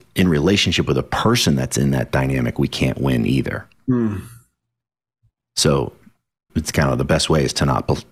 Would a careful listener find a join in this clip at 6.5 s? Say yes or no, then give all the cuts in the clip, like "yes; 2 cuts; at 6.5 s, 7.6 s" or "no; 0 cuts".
yes; 1 cut; at 6.5 s